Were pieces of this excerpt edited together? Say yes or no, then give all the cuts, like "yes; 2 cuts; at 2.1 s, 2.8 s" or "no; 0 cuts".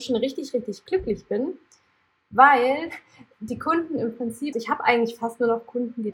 yes; 1 cut; at 4.5 s